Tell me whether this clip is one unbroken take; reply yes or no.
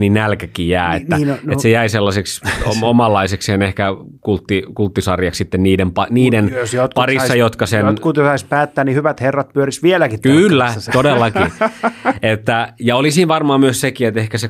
yes